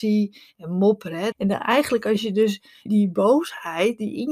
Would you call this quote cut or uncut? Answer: cut